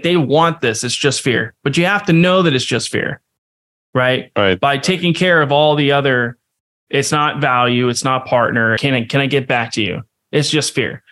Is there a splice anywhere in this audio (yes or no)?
yes